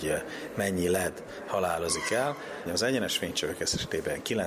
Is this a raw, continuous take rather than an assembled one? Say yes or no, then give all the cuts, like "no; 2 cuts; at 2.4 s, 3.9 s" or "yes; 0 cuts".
no; 1 cut; at 2.7 s